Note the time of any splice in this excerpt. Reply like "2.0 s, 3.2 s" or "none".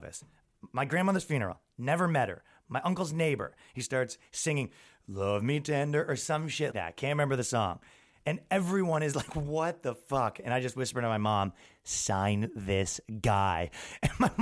6.7 s